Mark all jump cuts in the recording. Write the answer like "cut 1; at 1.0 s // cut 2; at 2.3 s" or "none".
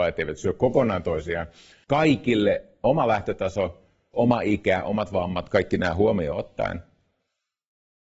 cut 1; at 1.8 s // cut 2; at 4.1 s